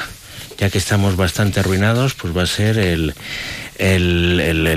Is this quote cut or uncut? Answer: uncut